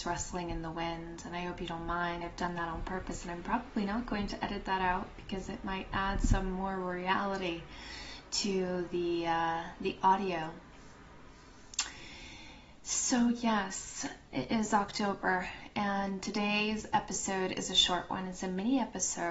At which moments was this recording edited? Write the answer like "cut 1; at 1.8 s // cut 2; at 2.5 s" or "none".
none